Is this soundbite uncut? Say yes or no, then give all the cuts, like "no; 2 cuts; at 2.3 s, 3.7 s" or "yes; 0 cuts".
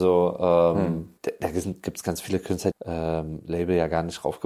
no; 2 cuts; at 1.2 s, 2.7 s